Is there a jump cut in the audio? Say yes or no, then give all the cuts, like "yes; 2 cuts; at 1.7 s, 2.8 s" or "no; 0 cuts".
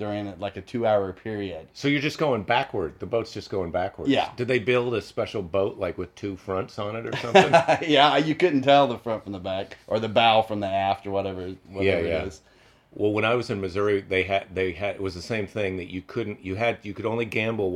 no; 0 cuts